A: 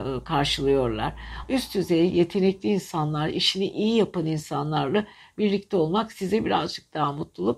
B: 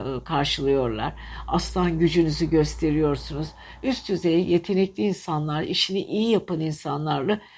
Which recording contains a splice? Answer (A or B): A